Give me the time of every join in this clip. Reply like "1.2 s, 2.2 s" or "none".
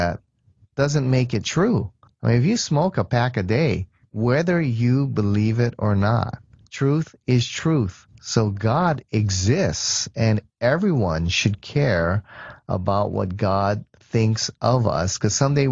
4.0 s, 8.1 s